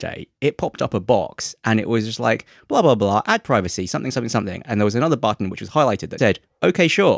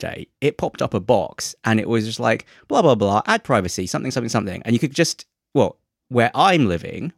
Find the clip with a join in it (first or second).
first